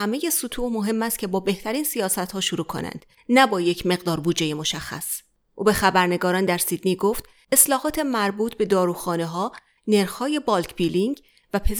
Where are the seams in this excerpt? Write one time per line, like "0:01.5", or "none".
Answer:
0:09.8